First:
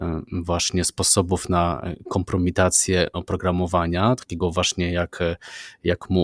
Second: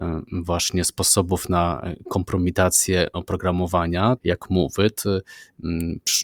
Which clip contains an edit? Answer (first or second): second